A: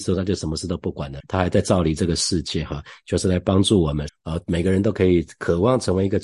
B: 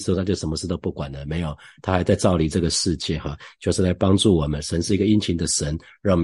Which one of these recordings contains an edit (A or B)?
A